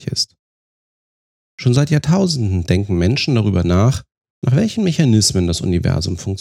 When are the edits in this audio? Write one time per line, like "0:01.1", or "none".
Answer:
none